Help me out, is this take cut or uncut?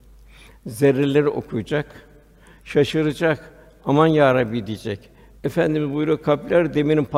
cut